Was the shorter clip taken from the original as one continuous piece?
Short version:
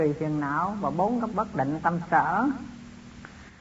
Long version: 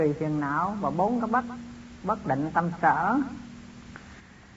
no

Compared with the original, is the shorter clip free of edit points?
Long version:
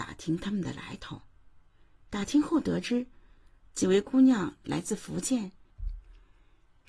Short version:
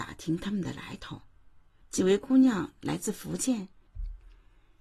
no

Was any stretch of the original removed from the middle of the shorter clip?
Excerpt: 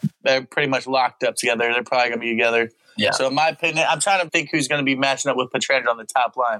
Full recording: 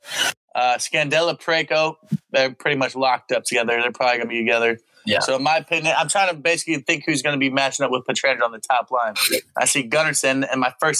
yes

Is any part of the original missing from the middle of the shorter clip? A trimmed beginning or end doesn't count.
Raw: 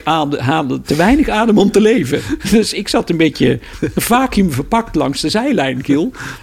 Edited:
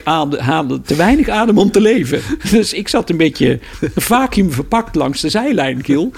no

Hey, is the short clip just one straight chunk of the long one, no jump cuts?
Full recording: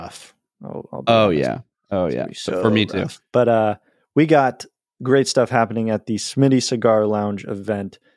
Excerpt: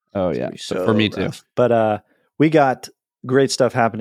yes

